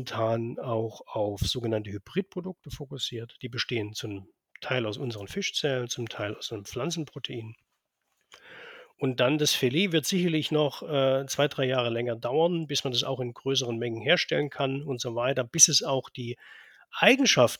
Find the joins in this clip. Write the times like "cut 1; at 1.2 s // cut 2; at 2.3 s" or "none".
cut 1; at 8.9 s